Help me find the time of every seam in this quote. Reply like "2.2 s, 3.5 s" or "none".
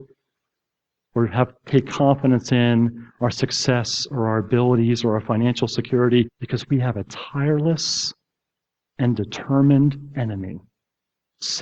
6.3 s